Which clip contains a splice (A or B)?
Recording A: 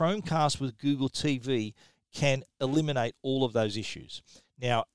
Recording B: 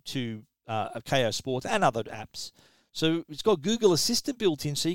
B